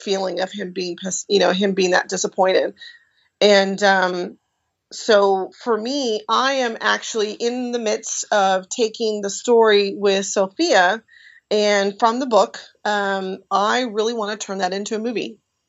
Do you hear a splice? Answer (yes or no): no